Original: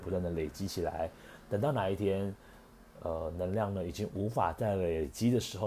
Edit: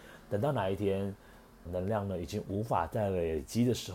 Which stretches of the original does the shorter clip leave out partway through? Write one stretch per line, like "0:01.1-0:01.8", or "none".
0:02.9-0:03.3